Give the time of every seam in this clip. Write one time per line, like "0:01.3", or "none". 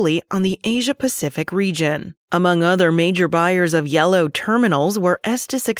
0:02.2